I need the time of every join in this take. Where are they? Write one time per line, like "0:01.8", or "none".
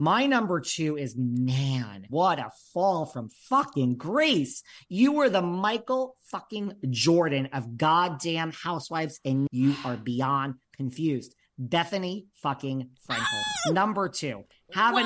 0:02.1
0:09.5